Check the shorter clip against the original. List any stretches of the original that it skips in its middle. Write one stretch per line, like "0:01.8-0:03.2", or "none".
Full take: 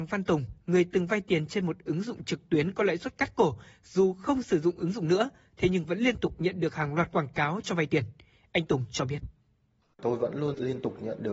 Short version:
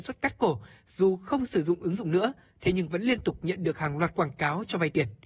none